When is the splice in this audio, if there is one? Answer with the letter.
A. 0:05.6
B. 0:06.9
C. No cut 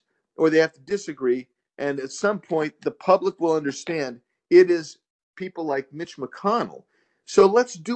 C